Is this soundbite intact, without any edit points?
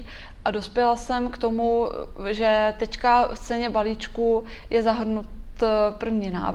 yes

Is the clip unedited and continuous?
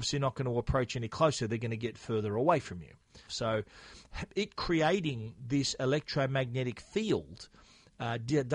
no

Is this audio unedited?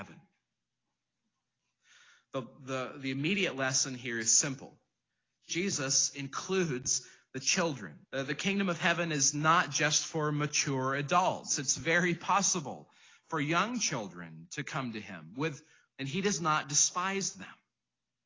no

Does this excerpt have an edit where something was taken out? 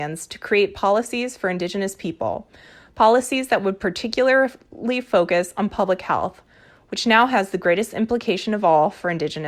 no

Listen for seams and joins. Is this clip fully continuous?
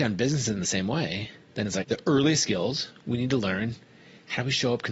no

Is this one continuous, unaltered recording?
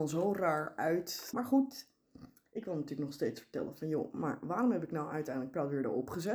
no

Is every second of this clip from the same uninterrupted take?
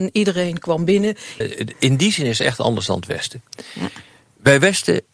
no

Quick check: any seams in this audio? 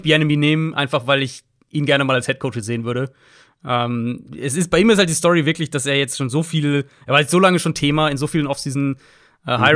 no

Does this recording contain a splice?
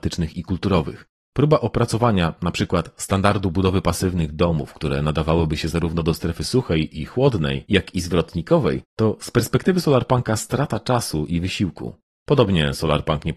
no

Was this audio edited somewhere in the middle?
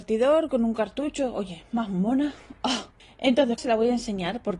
yes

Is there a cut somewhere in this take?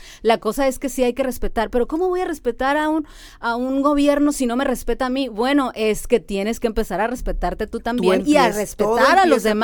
no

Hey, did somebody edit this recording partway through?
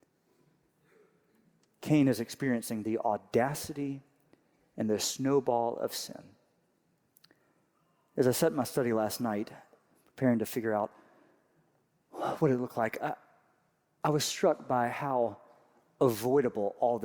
no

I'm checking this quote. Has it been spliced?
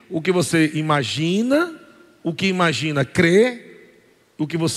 no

